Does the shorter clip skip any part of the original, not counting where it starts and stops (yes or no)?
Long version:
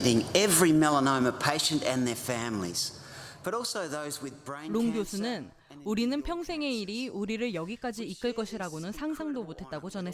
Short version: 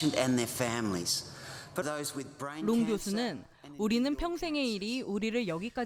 yes